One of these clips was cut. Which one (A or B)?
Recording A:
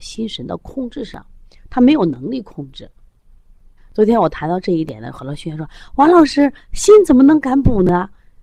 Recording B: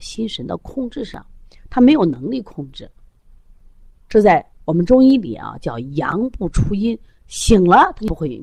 A